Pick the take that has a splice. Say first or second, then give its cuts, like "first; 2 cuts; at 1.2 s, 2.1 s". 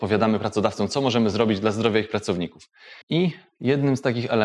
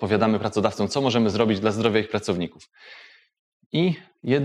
first; 1 cut; at 3.0 s